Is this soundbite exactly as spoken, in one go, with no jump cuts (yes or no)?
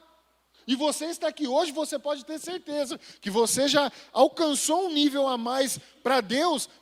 yes